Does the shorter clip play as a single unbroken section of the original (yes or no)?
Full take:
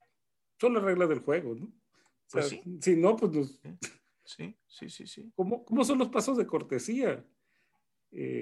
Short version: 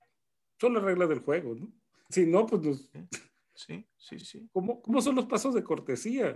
no